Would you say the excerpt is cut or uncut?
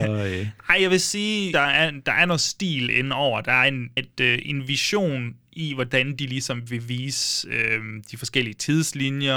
cut